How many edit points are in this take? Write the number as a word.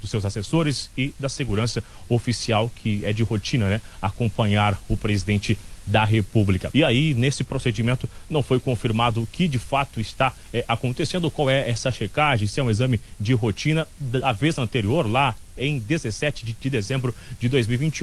one